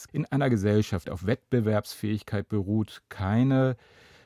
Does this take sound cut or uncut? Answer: cut